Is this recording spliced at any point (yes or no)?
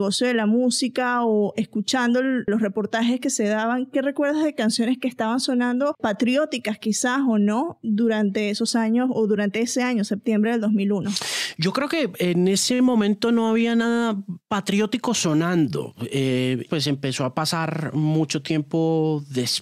yes